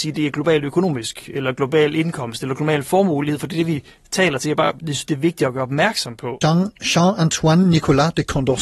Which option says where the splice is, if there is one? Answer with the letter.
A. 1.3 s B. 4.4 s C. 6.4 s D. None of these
C